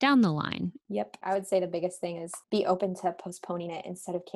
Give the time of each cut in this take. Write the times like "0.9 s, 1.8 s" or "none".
1.2 s, 2.4 s